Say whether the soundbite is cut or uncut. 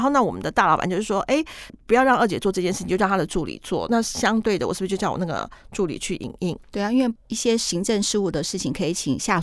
uncut